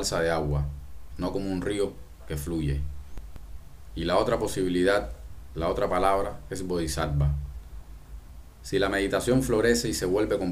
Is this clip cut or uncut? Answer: cut